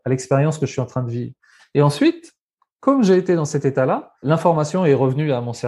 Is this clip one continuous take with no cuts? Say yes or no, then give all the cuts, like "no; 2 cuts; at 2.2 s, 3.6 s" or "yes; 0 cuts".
no; 2 cuts; at 1.6 s, 4.2 s